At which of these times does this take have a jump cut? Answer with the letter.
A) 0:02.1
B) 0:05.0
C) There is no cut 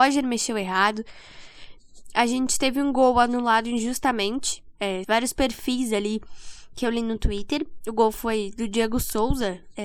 B